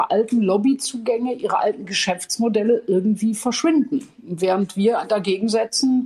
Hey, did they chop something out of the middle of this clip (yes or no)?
no